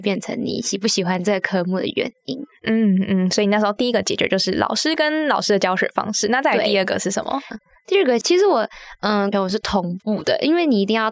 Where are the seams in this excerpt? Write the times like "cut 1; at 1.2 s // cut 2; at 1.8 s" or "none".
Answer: cut 1; at 9.3 s